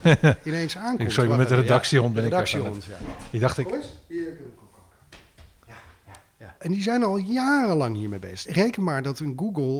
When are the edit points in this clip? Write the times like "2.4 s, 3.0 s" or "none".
6.6 s, 8.5 s